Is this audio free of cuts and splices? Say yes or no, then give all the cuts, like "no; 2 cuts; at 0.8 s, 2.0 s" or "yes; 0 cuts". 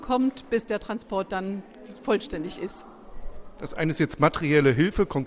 yes; 0 cuts